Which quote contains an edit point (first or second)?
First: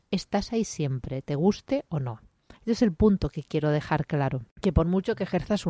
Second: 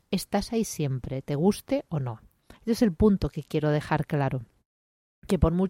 first